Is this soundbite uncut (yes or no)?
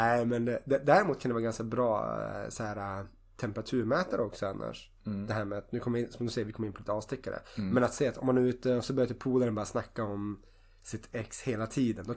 yes